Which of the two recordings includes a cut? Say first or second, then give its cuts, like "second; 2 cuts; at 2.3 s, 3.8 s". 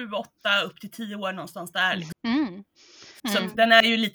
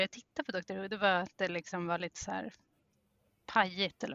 first; 2 cuts; at 2.1 s, 3.2 s